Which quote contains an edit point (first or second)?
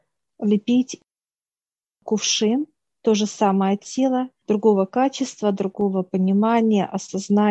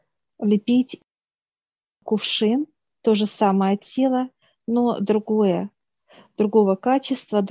first